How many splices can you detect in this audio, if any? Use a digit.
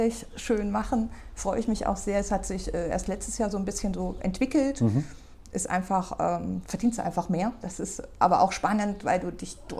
0